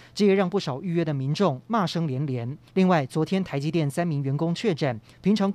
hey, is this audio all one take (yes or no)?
no